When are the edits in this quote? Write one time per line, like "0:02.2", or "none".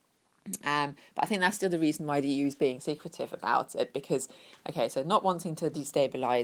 none